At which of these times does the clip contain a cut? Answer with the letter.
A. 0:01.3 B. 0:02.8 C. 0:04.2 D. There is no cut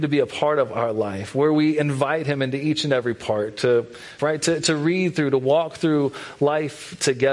C